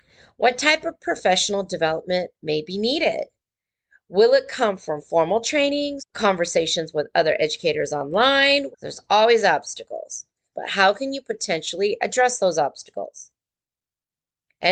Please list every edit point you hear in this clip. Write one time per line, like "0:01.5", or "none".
0:06.0
0:08.7
0:10.5